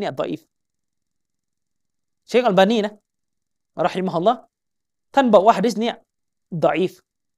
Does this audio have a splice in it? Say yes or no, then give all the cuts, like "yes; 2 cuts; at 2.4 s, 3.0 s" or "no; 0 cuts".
no; 0 cuts